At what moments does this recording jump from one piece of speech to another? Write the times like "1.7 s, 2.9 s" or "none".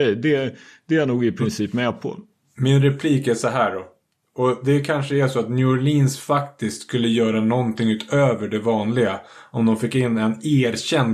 none